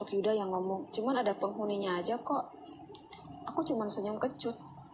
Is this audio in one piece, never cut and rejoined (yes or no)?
no